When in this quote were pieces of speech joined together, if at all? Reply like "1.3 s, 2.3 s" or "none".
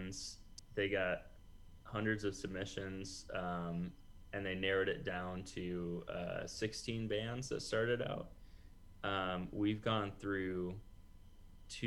none